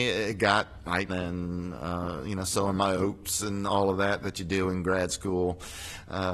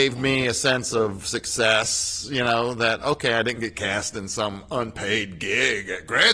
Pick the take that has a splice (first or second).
first